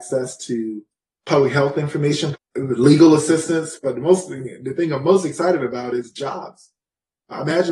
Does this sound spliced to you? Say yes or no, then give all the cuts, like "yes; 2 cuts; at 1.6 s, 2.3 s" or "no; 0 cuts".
yes; 2 cuts; at 2.3 s, 3.8 s